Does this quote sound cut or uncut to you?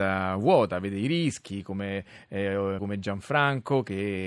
cut